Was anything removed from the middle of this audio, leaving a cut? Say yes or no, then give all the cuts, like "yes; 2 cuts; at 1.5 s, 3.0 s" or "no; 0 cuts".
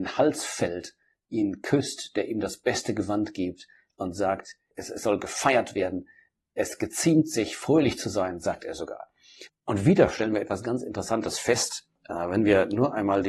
yes; 2 cuts; at 9.5 s, 12.0 s